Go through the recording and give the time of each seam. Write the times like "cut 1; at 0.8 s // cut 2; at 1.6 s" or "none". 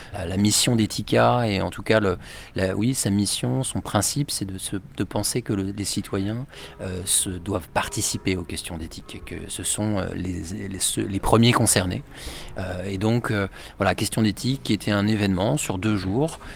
none